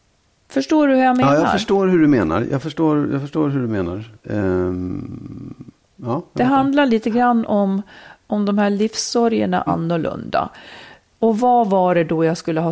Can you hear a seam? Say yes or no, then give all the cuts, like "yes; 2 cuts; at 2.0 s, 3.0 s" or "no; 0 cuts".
yes; 1 cut; at 9.7 s